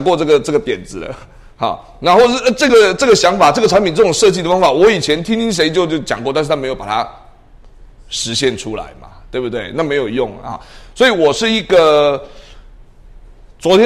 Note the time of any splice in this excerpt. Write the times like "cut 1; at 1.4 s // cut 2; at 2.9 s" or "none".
none